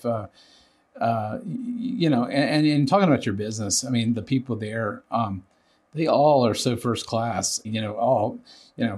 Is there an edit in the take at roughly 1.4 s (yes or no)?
no